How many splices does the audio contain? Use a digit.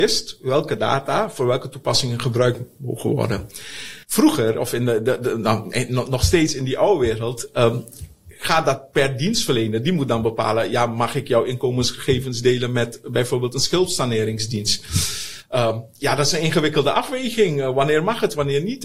1